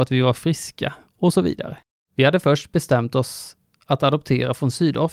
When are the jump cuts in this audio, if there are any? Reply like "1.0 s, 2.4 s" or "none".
2.0 s